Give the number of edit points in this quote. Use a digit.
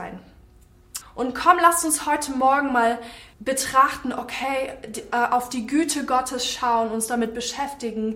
2